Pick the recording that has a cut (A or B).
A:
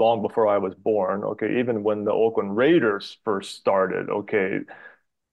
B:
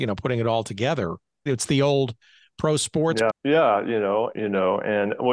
B